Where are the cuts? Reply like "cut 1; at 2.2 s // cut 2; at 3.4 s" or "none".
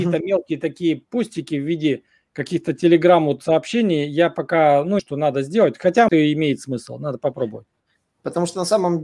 cut 1; at 5.0 s // cut 2; at 6.1 s